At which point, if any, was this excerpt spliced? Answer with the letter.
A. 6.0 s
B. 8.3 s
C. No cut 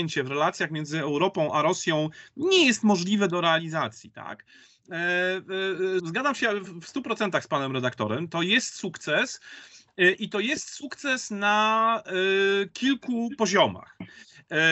A